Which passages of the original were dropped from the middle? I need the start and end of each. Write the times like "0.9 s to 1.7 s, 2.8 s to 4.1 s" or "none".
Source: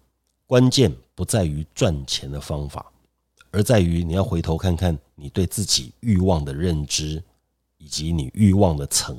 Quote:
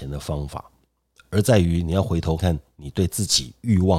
4.6 s to 4.8 s